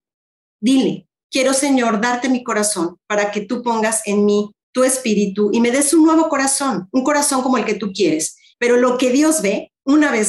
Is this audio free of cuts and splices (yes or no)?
no